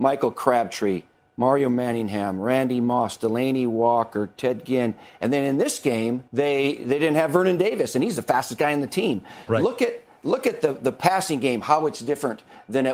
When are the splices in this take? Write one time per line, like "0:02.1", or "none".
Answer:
0:06.3
0:09.5